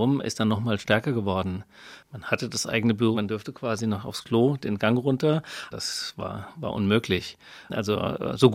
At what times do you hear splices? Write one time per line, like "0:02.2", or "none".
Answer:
0:03.1
0:05.7

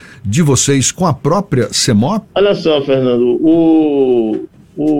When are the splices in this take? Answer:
0:02.2

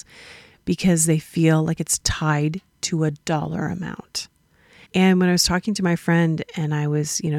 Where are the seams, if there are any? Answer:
0:04.8

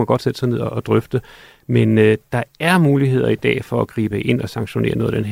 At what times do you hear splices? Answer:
none

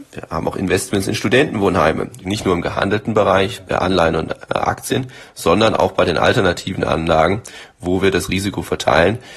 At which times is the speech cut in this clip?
0:02.2

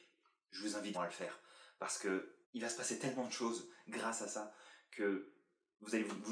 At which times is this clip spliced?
0:00.9
0:02.4

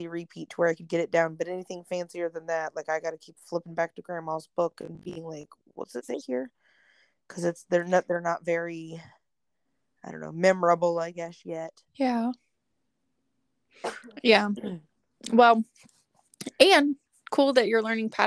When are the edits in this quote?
none

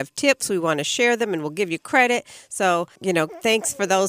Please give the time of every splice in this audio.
0:03.0

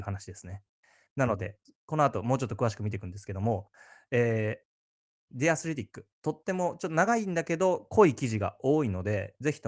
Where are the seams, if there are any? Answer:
0:05.3

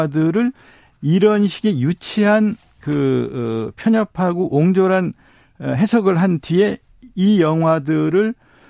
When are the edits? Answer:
none

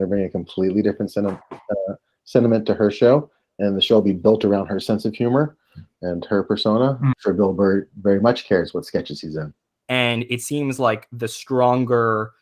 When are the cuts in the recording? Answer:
0:07.1
0:09.8

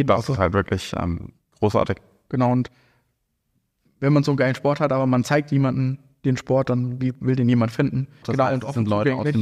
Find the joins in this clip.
0:08.2

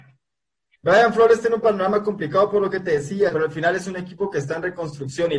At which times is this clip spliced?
0:03.3

